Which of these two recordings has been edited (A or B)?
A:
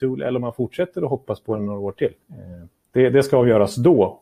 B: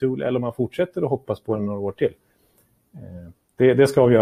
A